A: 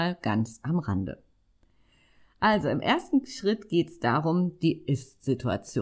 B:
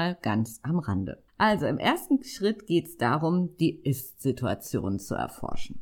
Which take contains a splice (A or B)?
B